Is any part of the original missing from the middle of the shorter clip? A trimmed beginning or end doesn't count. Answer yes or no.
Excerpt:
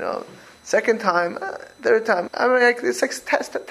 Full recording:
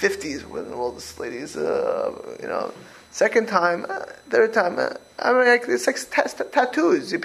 yes